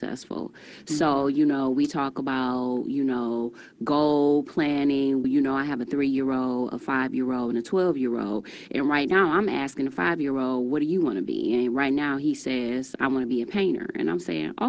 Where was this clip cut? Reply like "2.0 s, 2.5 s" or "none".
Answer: 5.2 s